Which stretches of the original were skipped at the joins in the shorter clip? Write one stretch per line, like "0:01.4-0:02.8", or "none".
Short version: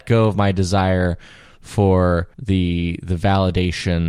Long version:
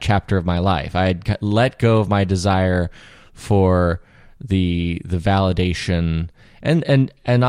0:04.1-0:04.4